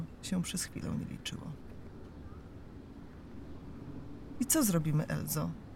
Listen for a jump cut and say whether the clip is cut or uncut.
uncut